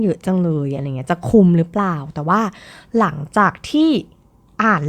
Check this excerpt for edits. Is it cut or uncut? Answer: uncut